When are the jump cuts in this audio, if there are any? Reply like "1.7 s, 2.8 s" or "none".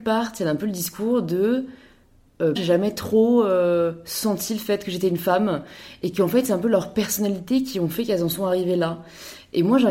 2.6 s